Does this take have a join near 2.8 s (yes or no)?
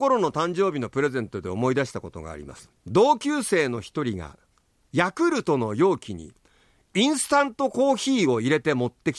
yes